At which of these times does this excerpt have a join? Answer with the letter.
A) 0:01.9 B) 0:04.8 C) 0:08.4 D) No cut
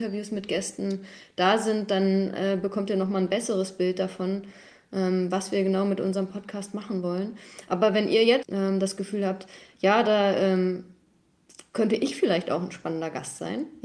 C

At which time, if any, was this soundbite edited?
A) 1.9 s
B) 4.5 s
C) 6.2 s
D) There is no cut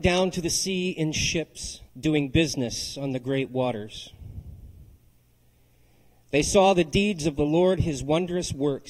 A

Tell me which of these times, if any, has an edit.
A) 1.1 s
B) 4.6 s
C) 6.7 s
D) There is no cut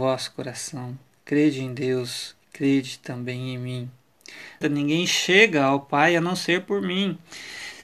B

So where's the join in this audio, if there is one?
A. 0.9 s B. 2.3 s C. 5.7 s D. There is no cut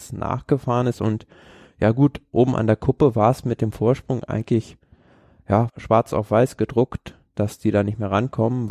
C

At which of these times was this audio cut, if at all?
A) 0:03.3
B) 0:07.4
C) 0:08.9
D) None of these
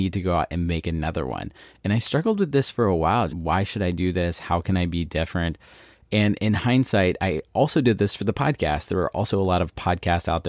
A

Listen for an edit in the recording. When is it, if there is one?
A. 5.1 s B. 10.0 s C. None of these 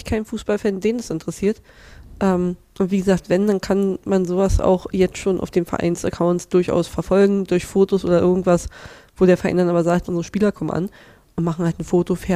B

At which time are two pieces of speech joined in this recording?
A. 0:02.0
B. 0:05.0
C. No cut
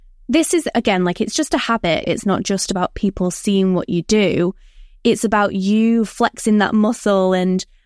A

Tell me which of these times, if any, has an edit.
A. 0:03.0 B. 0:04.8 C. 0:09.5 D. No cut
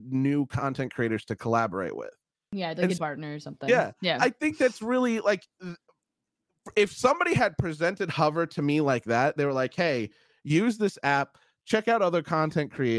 A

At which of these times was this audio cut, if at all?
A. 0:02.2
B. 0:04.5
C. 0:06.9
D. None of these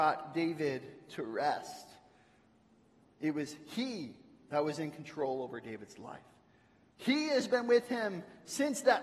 C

